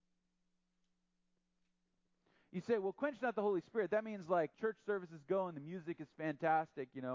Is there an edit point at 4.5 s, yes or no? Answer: yes